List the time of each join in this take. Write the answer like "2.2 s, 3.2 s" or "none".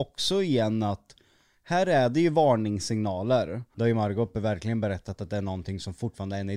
3.7 s